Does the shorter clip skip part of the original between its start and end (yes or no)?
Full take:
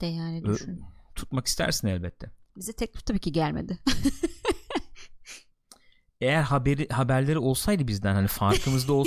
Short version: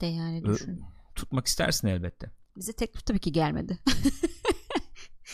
no